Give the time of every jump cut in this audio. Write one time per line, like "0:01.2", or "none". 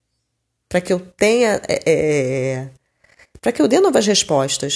none